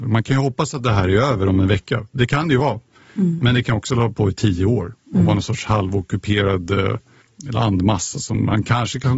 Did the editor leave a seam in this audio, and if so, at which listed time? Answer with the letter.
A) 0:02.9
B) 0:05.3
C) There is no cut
C